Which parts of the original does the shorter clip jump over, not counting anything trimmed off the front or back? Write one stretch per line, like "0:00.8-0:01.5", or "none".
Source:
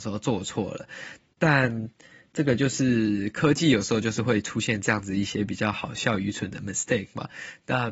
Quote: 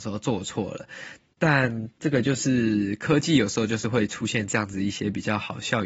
0:01.9-0:02.3